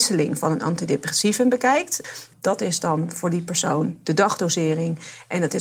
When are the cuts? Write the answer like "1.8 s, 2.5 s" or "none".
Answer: 2.3 s

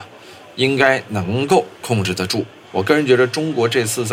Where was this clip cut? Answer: 2.6 s

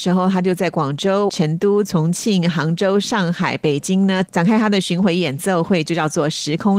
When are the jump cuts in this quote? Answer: 1.3 s

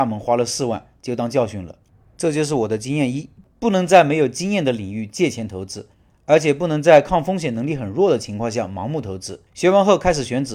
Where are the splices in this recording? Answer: 9.5 s

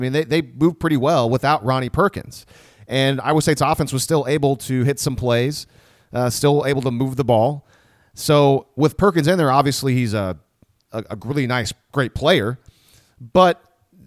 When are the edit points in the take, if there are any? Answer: none

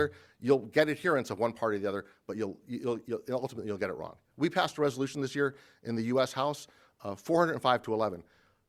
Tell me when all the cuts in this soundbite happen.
none

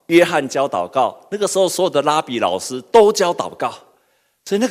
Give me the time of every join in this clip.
none

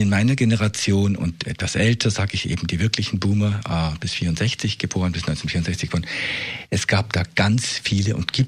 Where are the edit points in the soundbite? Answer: none

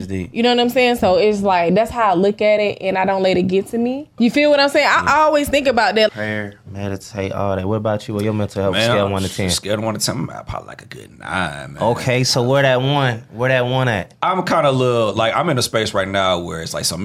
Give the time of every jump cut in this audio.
4.2 s, 6.1 s

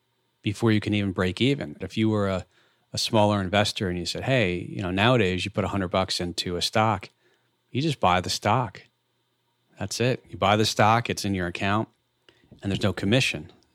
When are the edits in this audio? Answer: 1.8 s

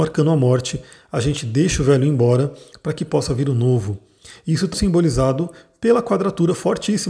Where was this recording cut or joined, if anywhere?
4.7 s

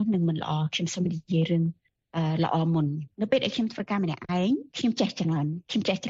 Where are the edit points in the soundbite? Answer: 3.1 s

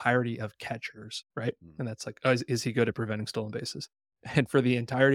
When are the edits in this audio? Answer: 1.2 s

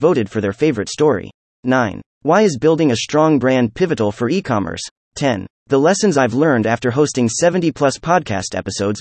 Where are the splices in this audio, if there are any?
1.5 s, 5.0 s

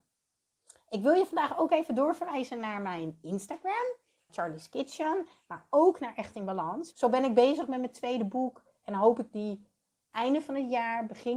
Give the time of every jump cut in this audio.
4.3 s, 6.9 s

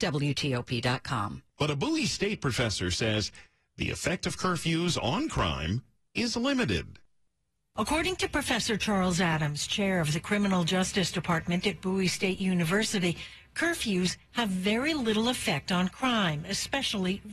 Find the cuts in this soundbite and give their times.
1.6 s

